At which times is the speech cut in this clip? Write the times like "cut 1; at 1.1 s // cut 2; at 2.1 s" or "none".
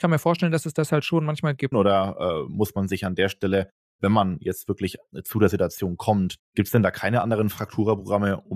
cut 1; at 1.7 s // cut 2; at 6.4 s